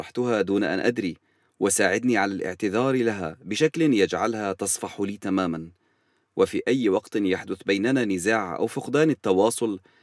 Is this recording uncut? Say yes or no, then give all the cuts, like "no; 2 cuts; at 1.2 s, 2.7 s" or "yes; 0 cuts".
yes; 0 cuts